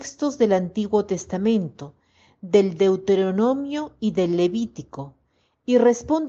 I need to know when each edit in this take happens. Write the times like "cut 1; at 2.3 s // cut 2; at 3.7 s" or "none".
none

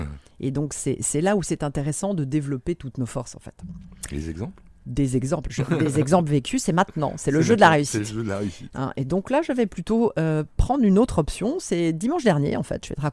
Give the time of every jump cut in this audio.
none

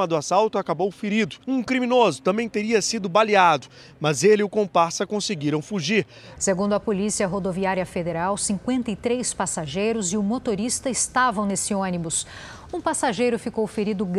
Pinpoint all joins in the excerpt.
cut 1; at 1.4 s // cut 2; at 6.4 s

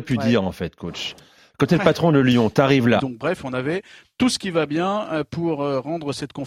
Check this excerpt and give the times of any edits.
cut 1; at 3.0 s

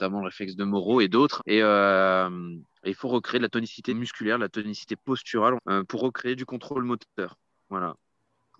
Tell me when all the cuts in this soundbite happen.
cut 1; at 1.4 s // cut 2; at 3.9 s // cut 3; at 5.6 s

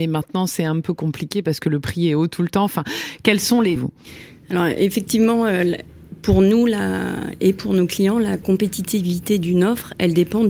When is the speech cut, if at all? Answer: cut 1; at 3.8 s

